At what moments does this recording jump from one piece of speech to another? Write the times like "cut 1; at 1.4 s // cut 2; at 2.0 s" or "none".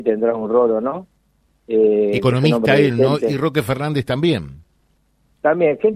none